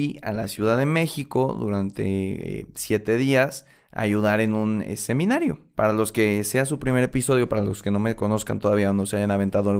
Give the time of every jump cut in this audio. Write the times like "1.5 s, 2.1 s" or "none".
none